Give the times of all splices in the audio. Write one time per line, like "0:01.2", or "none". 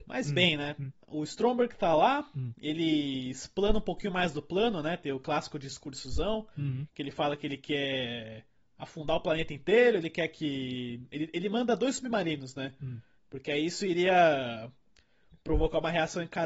0:13.2